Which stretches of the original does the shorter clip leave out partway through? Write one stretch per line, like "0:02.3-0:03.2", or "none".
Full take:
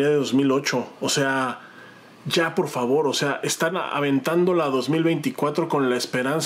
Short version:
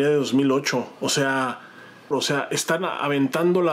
0:02.1-0:03.0